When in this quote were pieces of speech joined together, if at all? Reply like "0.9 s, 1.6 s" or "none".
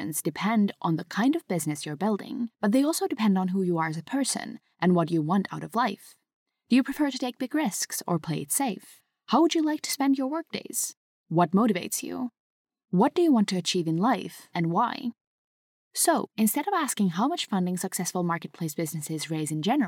none